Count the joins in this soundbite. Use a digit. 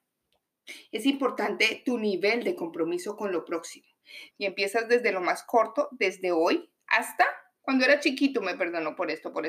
1